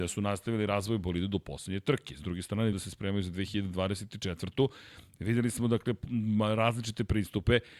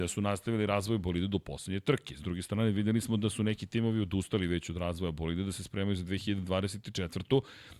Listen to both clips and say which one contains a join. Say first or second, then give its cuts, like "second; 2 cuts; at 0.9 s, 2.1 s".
first; 1 cut; at 2.7 s